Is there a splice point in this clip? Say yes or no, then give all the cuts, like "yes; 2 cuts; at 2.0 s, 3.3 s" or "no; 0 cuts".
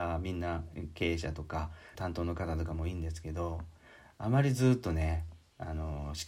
yes; 1 cut; at 2.0 s